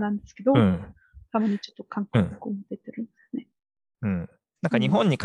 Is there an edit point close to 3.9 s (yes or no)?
yes